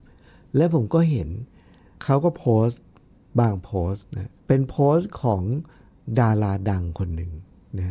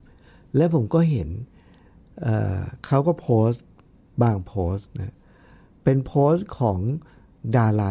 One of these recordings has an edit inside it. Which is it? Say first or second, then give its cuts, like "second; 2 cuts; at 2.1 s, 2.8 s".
first; 2 cuts; at 2.0 s, 4.4 s